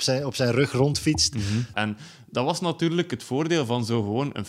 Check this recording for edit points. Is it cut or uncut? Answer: cut